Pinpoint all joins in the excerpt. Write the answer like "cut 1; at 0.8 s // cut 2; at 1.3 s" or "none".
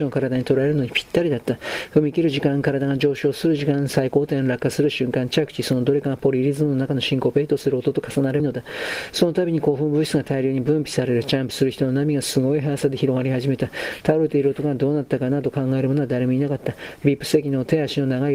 cut 1; at 8.4 s

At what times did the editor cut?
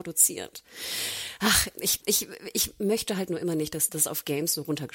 cut 1; at 2.0 s // cut 2; at 3.9 s

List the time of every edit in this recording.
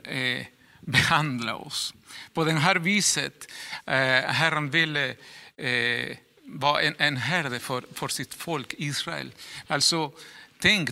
cut 1; at 9.7 s

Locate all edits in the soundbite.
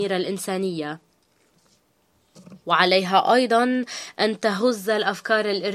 cut 1; at 2.6 s

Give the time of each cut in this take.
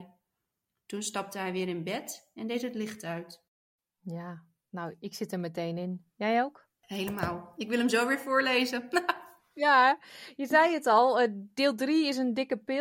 none

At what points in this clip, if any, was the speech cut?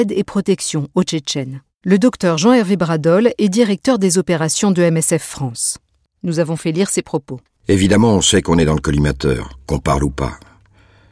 none

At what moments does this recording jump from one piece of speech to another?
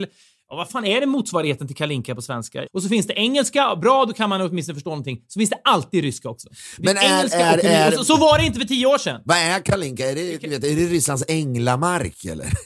cut 1; at 2.7 s

